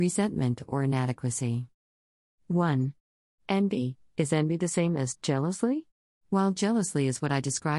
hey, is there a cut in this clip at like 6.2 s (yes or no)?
yes